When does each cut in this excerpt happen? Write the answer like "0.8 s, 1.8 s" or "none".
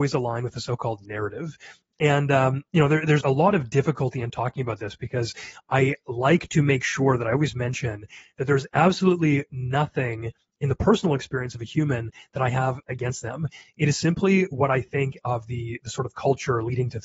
3.2 s